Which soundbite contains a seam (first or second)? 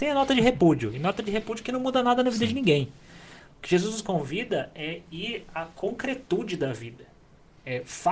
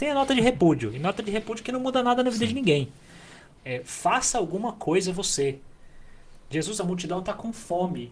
second